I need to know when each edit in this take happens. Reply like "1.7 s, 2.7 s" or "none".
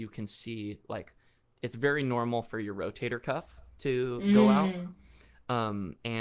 none

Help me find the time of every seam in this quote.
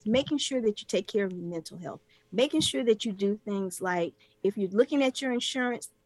none

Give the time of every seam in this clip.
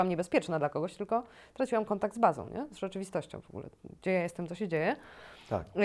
none

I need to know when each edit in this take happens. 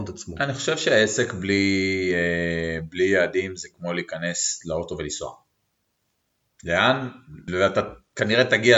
7.5 s

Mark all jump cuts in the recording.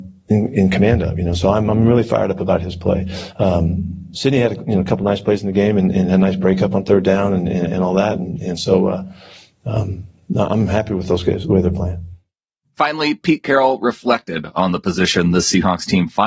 none

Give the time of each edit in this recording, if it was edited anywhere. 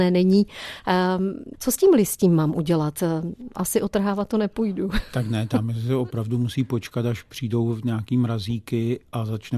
1.5 s

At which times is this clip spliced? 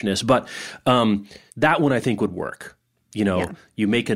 1.5 s

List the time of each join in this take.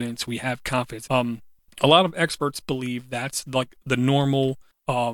1.1 s

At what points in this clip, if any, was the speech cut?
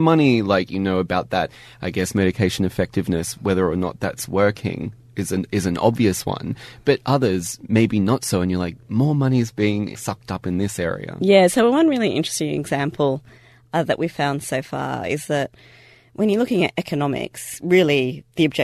none

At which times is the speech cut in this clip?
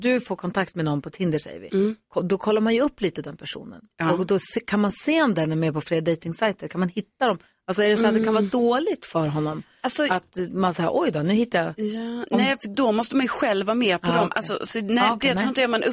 none

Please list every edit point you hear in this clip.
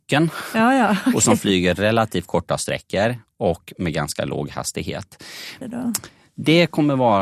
5.6 s

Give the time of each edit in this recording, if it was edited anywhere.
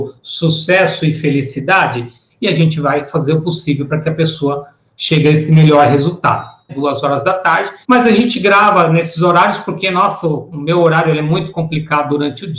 2.3 s, 6.7 s, 7.8 s

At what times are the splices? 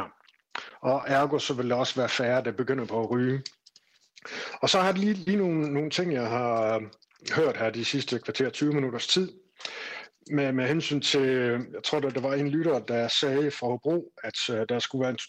none

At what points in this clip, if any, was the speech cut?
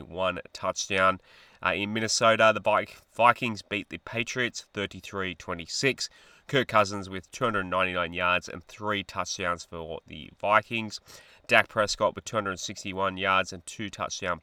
11.3 s

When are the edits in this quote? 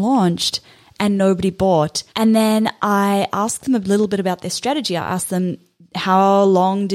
2.1 s

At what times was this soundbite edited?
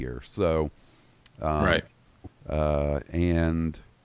2.3 s

